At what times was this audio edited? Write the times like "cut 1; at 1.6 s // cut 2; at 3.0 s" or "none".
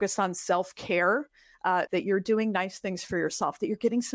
cut 1; at 1.9 s